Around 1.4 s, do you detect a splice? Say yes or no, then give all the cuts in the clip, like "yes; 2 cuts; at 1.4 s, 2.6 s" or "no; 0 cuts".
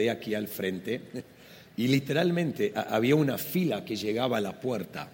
no; 0 cuts